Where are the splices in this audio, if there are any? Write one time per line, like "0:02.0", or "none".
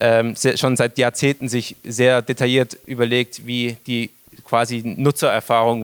none